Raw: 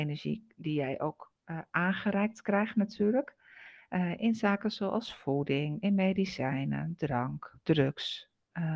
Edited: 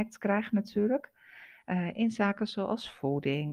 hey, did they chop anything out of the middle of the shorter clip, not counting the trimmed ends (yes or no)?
no